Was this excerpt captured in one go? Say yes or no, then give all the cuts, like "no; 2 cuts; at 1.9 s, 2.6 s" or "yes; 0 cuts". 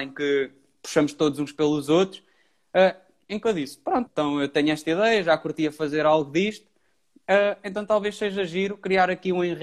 no; 1 cut; at 4.1 s